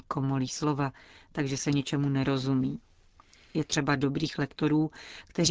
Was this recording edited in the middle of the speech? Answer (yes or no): no